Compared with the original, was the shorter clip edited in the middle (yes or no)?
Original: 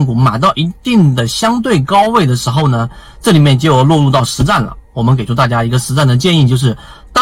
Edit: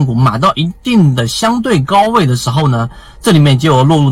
no